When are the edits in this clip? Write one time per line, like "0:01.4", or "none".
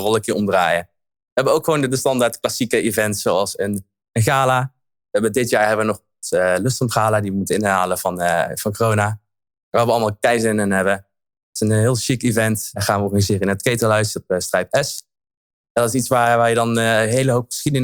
none

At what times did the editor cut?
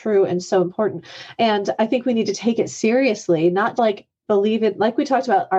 0:03.8

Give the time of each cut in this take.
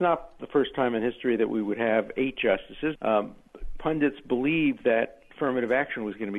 0:03.0

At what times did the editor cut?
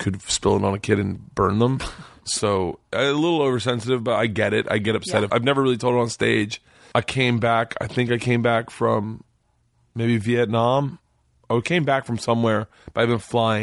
0:05.3
0:06.9

